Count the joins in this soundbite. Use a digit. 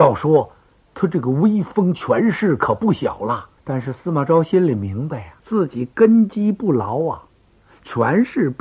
2